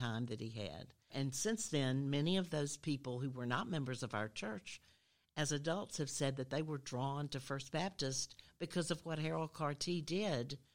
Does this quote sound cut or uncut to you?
cut